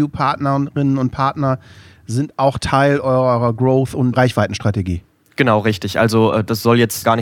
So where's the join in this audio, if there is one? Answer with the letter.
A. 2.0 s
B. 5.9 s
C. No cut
C